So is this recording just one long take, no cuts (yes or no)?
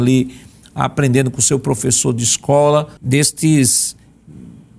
no